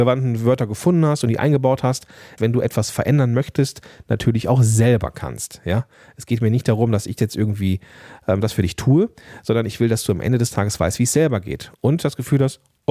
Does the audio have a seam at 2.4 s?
yes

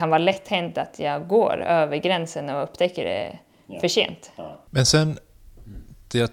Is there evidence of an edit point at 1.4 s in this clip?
no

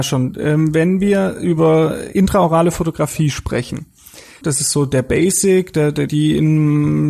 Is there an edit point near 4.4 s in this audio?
yes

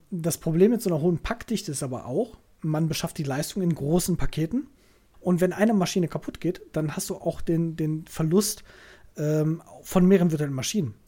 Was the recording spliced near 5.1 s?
yes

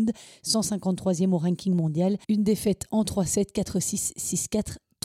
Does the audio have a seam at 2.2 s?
yes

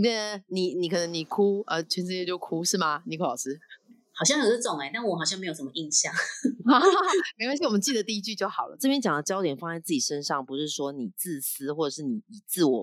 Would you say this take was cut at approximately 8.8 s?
yes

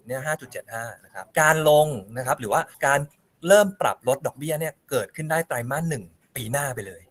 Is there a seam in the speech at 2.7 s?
yes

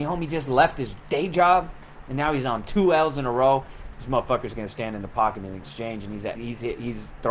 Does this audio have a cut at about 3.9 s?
yes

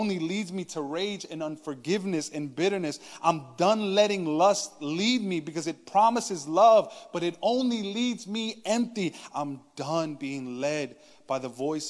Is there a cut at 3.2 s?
no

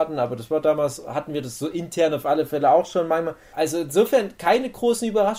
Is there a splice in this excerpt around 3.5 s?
yes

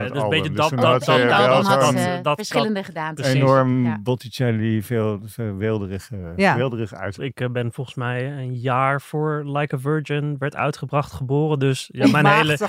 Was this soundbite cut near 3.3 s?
no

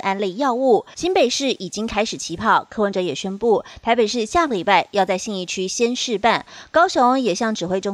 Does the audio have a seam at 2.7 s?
no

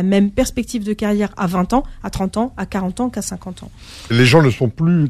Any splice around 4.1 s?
yes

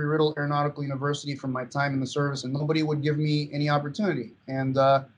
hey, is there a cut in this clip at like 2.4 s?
yes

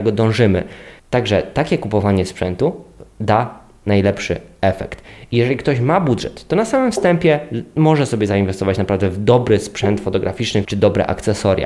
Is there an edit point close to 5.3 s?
no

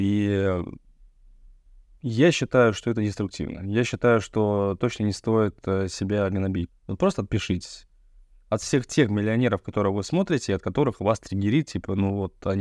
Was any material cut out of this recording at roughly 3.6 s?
no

